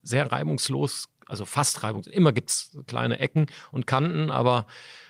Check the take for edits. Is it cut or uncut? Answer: uncut